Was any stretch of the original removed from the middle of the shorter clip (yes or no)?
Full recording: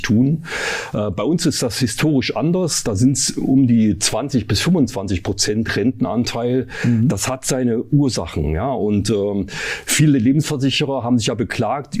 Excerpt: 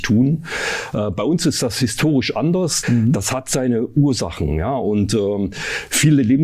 yes